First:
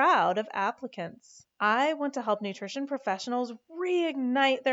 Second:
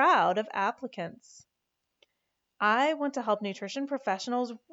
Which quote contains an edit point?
first; 1 cut; at 1.5 s

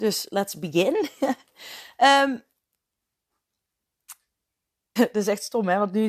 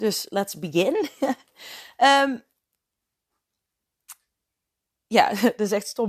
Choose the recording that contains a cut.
first; 1 cut; at 5.0 s

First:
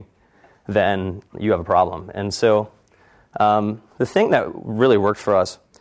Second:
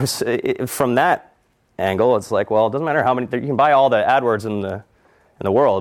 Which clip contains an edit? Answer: first; 2 cuts; at 2.1 s, 3.9 s

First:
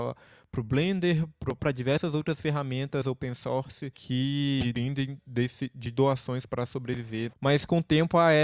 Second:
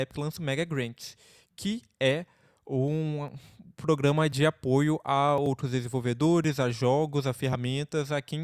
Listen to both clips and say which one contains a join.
first; 2 cuts; at 1.6 s, 7.3 s

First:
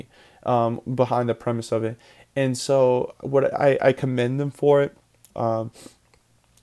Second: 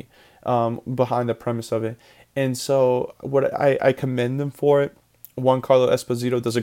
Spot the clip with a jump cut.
first; 1 cut; at 5.3 s

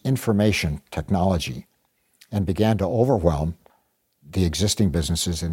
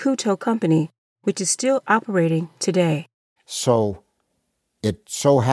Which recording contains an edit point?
second; 1 cut; at 3.4 s

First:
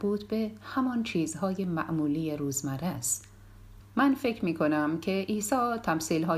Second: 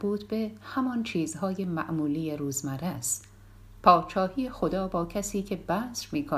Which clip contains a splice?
first; 1 cut; at 3.8 s

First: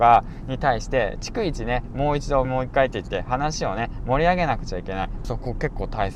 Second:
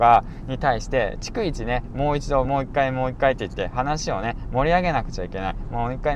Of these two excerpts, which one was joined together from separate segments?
first; 2 cuts; at 2.4 s, 5.2 s

